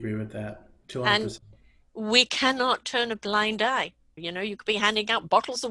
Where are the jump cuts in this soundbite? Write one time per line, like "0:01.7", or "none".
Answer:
0:04.2